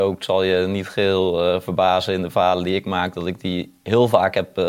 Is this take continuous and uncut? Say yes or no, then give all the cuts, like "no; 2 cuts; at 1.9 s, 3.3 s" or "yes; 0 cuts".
yes; 0 cuts